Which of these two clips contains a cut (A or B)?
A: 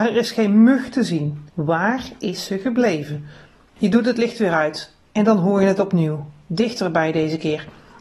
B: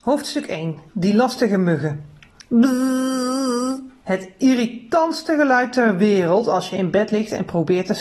A